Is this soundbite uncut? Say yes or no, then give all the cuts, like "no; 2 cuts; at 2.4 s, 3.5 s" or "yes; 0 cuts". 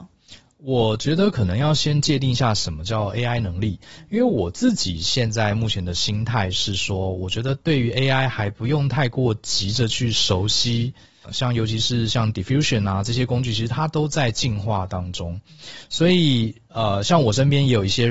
no; 1 cut; at 11.2 s